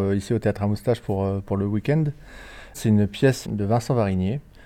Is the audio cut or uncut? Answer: cut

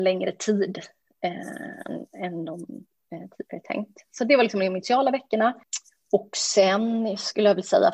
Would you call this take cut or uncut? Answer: uncut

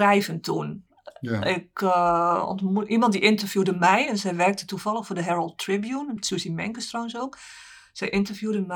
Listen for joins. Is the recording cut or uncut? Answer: uncut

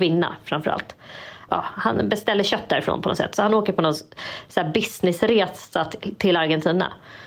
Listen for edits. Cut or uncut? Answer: cut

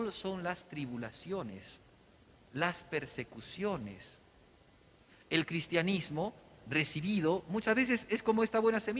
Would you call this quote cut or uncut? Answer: uncut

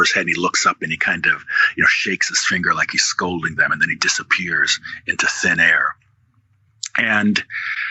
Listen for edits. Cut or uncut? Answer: uncut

